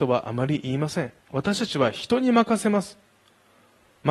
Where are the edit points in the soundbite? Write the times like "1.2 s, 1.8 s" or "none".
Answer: 1.2 s

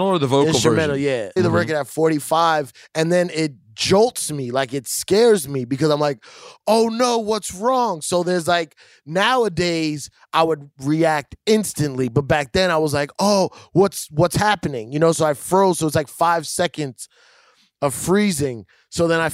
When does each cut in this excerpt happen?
1.4 s

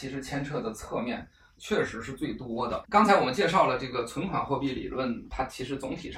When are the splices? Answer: 2.8 s

